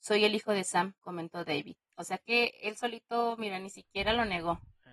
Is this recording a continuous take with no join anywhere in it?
yes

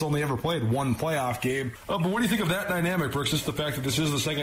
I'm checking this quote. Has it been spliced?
no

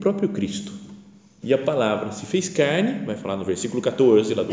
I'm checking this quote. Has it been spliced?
yes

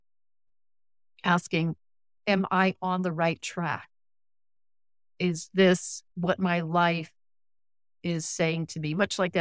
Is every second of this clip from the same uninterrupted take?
no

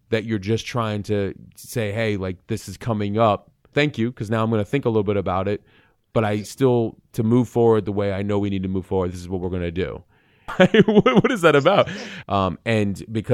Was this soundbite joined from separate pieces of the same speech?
yes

